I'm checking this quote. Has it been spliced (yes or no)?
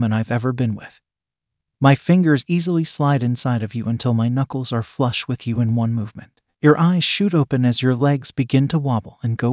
no